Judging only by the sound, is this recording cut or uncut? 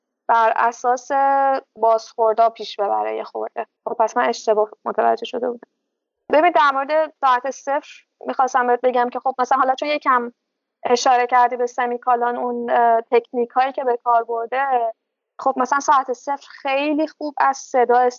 cut